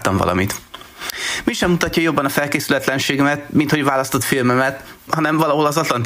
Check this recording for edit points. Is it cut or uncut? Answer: cut